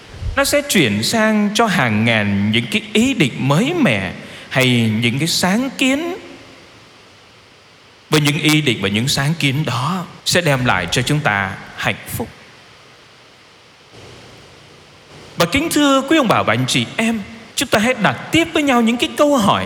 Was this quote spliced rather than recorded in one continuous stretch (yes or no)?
yes